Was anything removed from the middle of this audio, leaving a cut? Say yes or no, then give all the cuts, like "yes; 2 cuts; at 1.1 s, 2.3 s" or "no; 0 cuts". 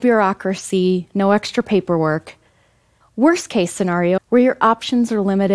yes; 2 cuts; at 3.0 s, 4.2 s